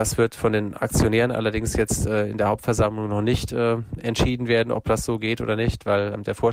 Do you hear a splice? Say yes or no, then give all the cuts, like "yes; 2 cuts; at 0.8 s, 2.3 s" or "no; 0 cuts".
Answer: no; 0 cuts